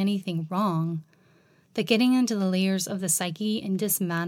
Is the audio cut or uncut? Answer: uncut